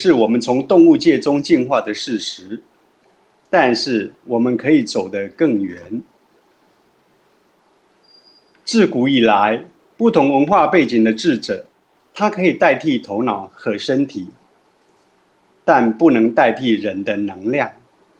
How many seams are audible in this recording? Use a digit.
1